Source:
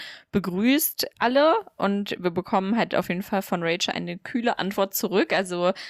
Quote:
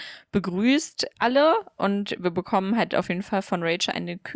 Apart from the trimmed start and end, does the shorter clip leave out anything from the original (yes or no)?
no